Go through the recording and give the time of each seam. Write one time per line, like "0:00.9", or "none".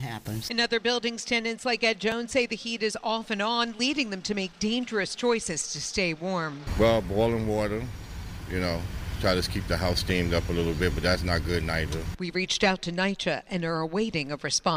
none

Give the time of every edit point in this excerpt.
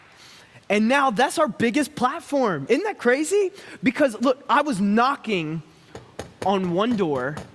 none

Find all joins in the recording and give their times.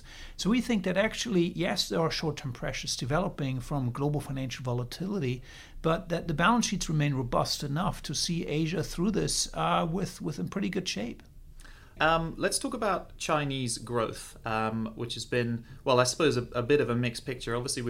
0:12.0

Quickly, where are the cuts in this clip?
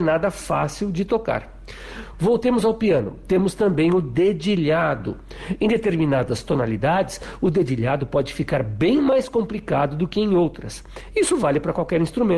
0:02.1

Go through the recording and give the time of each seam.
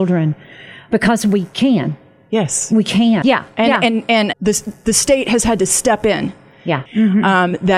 0:03.2
0:04.3
0:06.9

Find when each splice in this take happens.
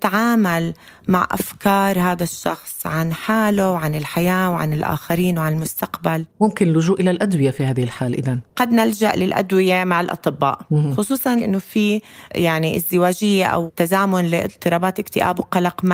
0:08.5

